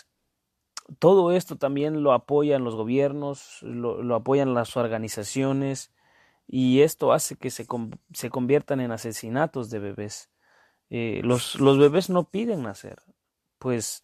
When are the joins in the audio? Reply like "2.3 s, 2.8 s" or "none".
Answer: none